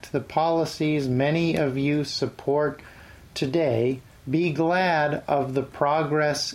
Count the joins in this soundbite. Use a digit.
1